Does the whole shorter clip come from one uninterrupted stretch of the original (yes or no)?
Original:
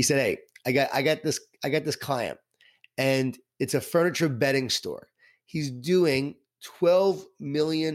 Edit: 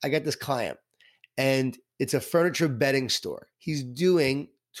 no